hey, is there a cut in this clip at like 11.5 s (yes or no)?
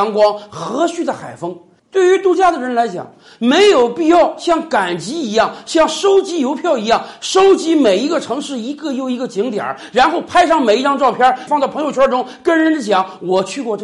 yes